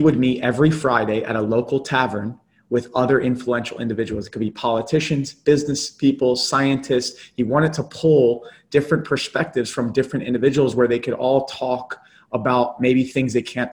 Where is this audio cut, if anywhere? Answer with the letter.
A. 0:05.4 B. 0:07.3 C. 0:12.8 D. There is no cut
D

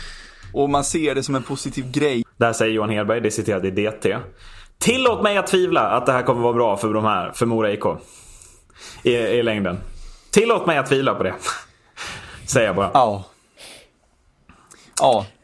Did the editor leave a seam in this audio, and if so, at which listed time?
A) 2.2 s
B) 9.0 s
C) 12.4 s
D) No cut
A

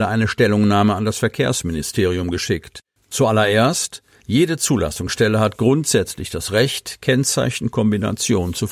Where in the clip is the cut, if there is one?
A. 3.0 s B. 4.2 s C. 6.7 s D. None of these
A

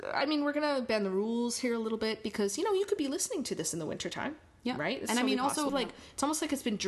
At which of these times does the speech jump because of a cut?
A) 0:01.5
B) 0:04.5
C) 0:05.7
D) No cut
C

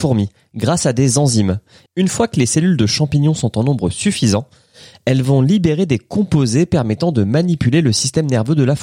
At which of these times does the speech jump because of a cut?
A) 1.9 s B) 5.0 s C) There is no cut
A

